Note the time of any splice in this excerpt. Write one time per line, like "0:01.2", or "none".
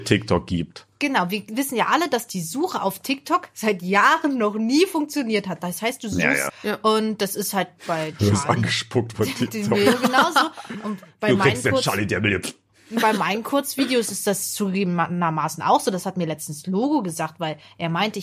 0:06.5